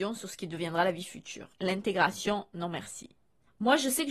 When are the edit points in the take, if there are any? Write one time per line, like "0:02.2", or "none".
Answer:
0:01.5